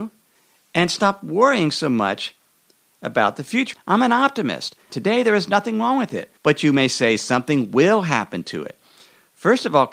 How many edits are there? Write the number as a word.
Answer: three